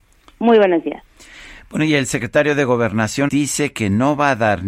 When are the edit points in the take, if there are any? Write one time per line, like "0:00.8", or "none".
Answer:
0:03.3

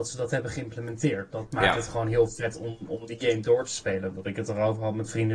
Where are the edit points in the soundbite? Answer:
none

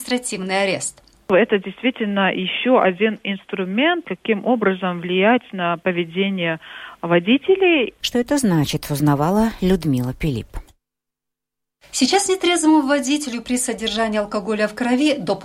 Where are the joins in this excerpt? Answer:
0:08.0

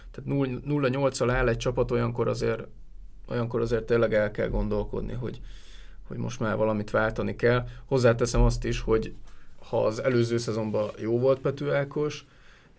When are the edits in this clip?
none

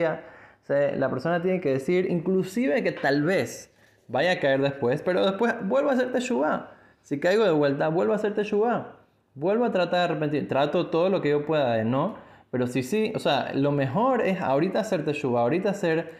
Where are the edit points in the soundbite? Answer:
none

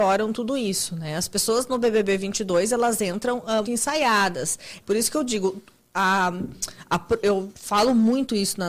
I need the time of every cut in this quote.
0:03.6
0:04.8

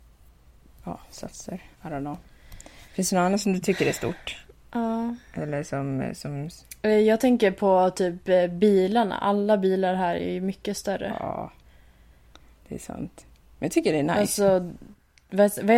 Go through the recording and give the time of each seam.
none

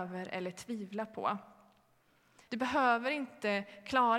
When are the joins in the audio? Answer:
0:02.5

